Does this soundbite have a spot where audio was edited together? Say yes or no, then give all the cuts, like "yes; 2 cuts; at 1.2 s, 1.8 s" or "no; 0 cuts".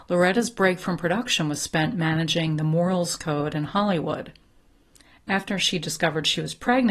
no; 0 cuts